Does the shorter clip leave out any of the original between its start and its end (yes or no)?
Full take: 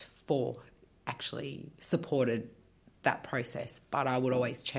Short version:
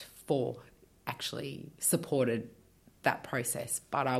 no